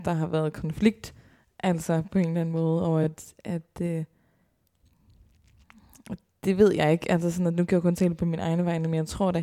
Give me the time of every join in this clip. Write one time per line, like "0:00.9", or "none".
none

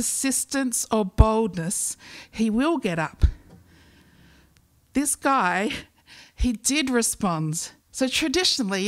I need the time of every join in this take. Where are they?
0:07.9

